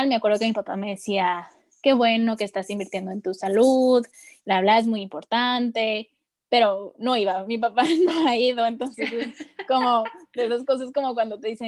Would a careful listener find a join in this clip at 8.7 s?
no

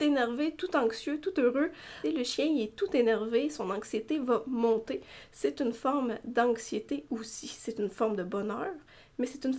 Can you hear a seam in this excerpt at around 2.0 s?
yes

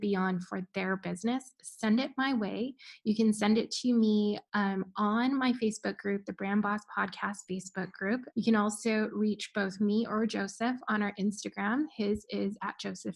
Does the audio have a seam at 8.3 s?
yes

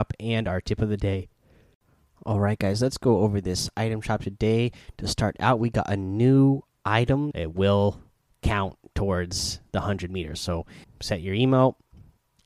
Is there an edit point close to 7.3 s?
yes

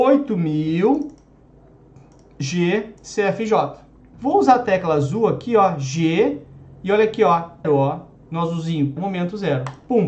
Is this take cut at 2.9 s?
no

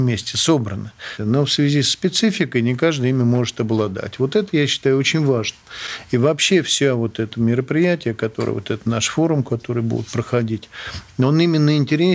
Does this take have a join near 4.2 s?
no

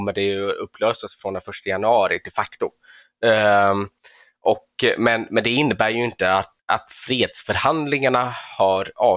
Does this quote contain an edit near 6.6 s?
yes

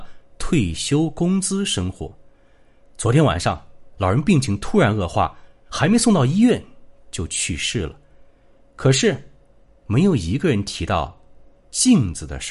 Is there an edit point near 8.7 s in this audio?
no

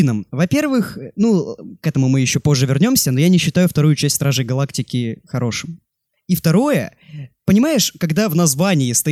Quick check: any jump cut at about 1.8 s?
no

